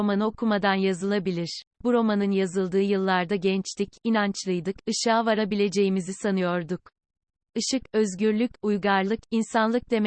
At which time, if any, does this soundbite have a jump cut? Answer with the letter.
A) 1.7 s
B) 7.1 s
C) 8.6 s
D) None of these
A